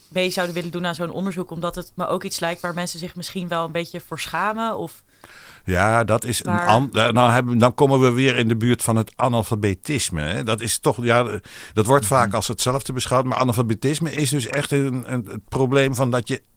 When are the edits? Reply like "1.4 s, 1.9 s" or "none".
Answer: none